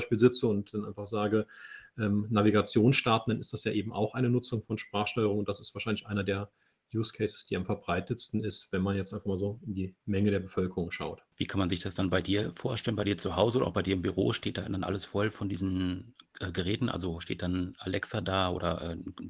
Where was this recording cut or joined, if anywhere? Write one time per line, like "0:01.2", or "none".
0:11.3
0:17.7

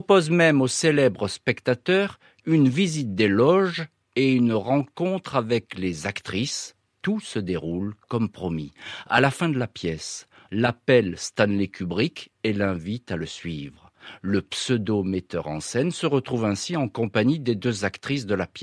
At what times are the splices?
0:10.5

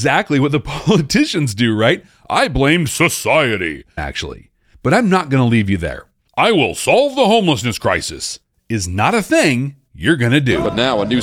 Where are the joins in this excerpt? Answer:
0:04.0
0:06.2

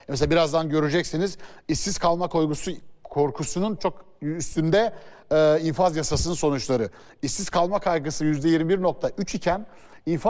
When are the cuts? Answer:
0:03.8

